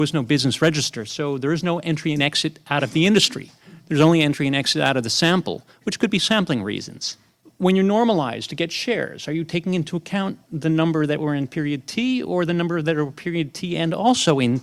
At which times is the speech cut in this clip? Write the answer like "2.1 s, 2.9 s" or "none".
none